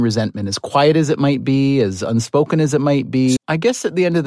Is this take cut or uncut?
cut